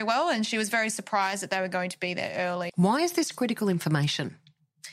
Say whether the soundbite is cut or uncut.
cut